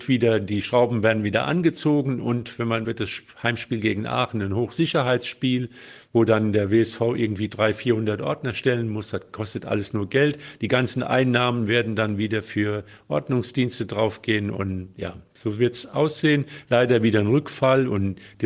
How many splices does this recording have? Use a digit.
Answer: 1